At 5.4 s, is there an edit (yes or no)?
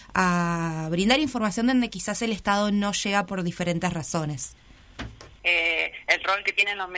yes